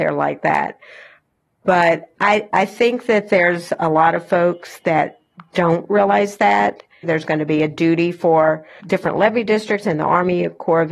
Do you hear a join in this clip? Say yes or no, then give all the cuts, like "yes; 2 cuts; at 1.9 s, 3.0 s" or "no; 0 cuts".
yes; 2 cuts; at 7.0 s, 8.8 s